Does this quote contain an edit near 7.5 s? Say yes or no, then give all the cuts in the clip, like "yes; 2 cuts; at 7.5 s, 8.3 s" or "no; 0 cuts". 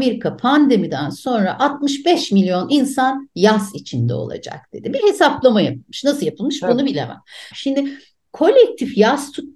yes; 1 cut; at 7.5 s